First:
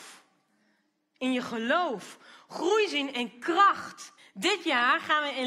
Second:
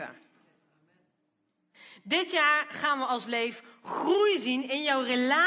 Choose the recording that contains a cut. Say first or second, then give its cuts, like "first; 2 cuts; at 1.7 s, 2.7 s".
first; 1 cut; at 4.2 s